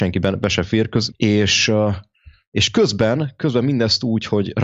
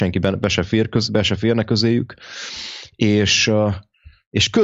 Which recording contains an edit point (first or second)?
first